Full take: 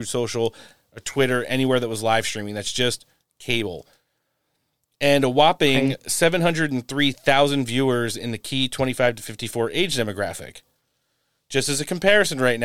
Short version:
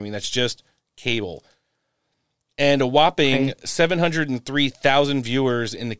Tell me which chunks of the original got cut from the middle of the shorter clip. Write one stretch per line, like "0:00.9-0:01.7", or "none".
none